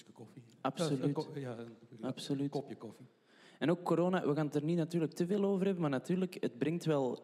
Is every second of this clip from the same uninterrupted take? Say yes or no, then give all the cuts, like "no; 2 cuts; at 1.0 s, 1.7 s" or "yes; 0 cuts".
yes; 0 cuts